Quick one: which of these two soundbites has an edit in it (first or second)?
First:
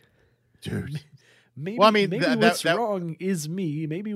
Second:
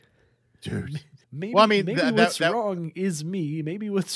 second